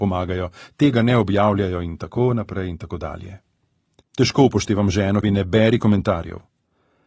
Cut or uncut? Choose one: cut